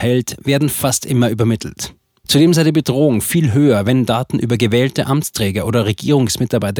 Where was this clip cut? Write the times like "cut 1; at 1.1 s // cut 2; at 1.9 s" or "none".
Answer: cut 1; at 2.2 s